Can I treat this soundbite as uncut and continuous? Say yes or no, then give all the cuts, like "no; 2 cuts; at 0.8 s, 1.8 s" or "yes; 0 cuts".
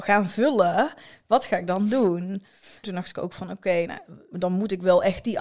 no; 2 cuts; at 2.8 s, 4.3 s